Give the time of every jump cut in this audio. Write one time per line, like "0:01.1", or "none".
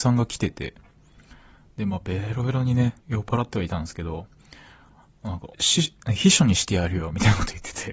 0:03.0
0:05.5